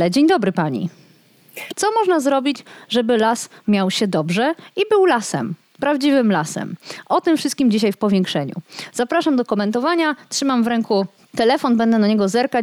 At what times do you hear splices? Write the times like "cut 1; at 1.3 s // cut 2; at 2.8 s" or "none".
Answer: cut 1; at 1.7 s